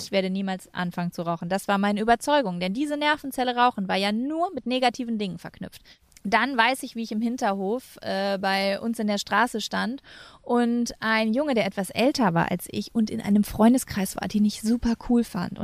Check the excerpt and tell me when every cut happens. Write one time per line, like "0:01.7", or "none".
none